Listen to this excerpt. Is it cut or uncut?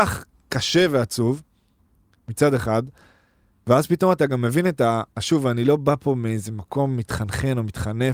cut